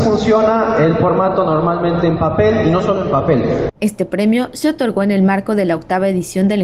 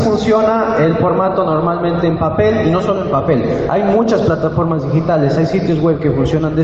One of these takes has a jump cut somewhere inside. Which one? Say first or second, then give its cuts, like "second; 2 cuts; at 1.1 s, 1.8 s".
first; 1 cut; at 3.7 s